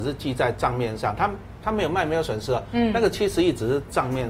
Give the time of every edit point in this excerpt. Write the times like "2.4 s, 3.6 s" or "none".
none